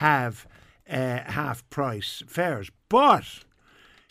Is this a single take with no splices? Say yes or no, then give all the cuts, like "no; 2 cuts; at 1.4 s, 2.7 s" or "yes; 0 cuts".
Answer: yes; 0 cuts